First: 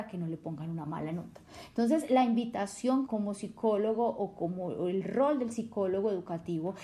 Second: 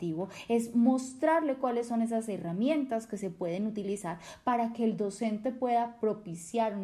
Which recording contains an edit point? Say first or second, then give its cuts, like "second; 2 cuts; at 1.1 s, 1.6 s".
first; 1 cut; at 3.1 s